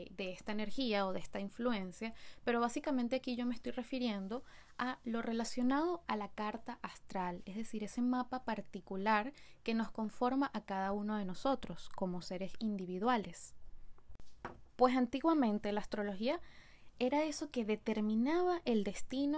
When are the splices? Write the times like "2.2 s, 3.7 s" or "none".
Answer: 14.7 s